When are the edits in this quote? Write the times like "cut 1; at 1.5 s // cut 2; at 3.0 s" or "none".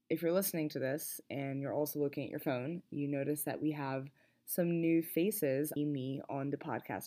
cut 1; at 5.8 s